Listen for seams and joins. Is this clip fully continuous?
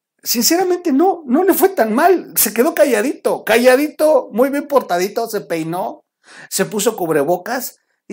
yes; 0 cuts

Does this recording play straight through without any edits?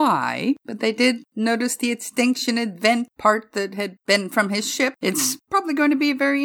no; 1 cut; at 5.0 s

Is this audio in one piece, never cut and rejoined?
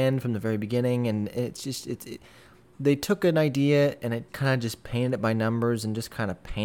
no; 1 cut; at 4.3 s

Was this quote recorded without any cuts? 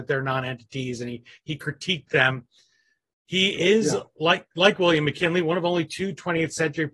yes; 0 cuts

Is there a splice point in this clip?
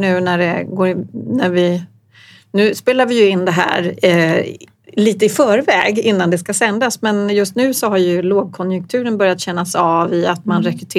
no; 0 cuts

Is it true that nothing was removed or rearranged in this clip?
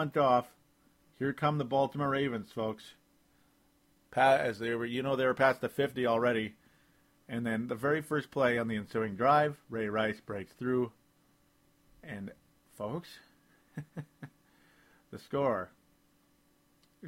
yes; 0 cuts

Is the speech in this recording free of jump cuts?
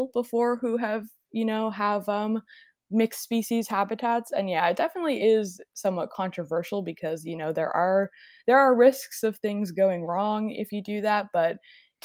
yes; 0 cuts

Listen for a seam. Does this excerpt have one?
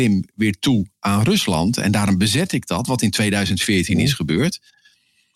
no; 0 cuts

